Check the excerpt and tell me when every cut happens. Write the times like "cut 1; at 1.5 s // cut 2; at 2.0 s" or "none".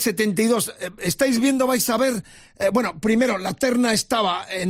none